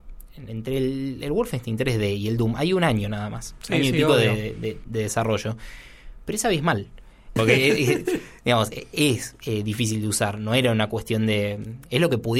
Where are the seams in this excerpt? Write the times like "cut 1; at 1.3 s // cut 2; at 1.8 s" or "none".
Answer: cut 1; at 7.4 s